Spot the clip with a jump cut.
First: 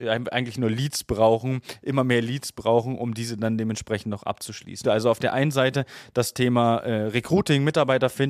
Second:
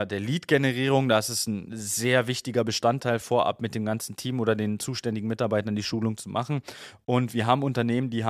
first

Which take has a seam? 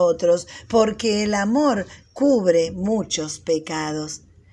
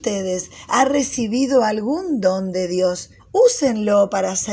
second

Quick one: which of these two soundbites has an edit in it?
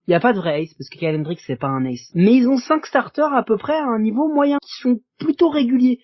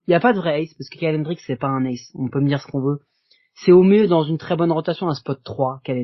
first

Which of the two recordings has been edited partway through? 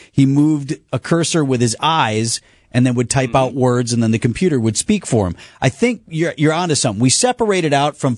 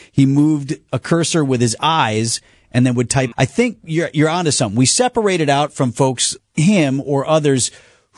second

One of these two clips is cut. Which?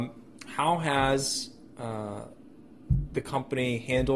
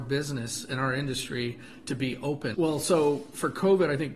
second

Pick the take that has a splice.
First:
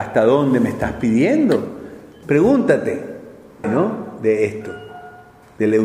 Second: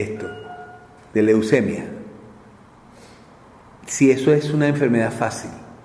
first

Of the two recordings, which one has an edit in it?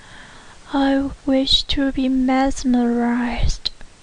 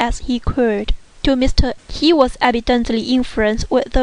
second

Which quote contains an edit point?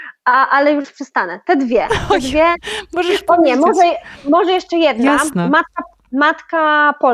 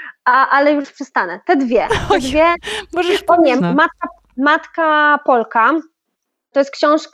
second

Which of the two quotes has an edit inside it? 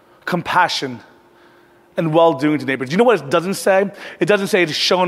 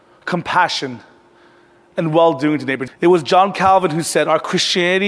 second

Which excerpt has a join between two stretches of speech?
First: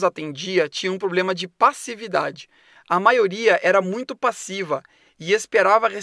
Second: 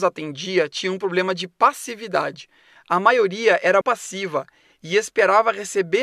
second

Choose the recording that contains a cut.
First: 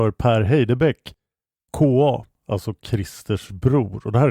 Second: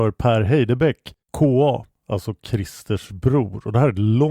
second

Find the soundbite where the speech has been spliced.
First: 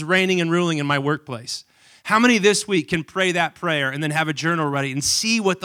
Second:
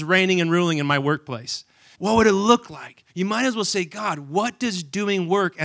second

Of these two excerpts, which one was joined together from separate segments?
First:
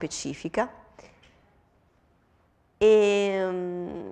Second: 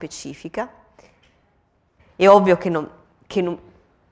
second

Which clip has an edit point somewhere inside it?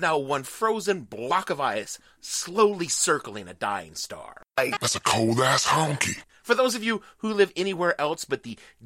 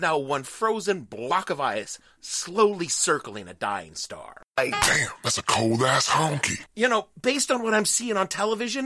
first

